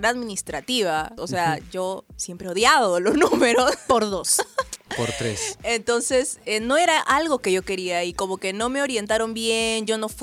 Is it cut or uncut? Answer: cut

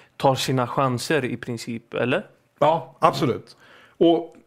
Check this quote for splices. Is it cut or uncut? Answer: uncut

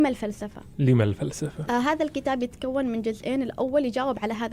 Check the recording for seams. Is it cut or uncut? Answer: cut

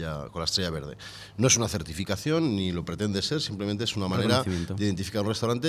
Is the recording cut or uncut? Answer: uncut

